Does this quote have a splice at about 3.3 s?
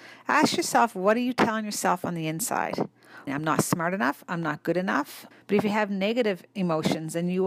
yes; 2 cuts; at 3.3 s, 5.3 s

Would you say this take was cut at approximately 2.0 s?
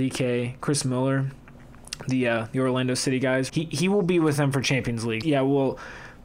no; 2 cuts; at 3.5 s, 5.2 s

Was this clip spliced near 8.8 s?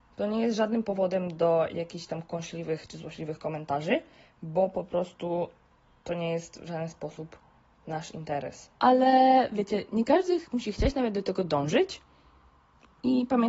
yes; 1 cut; at 8.8 s

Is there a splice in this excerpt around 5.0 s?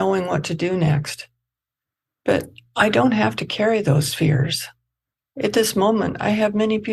no; 0 cuts

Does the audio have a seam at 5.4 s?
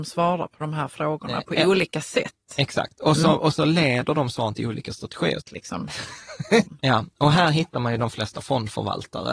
yes; 2 cuts; at 5.4 s, 6.6 s

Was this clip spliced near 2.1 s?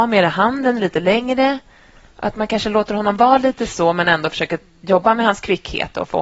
no; 0 cuts

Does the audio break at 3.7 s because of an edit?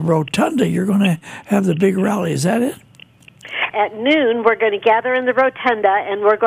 yes; 1 cut; at 3.7 s

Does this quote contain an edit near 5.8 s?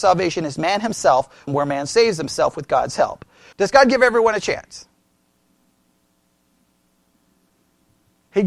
no; 2 cuts; at 1.5 s, 3.5 s

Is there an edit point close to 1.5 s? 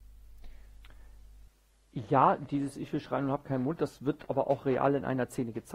no; 0 cuts

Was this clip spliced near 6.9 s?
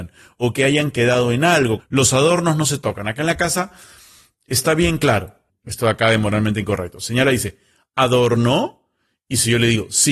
no; 2 cuts; at 1.8 s, 5.5 s

